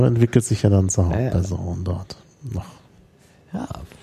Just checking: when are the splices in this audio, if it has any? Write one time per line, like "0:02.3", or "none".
none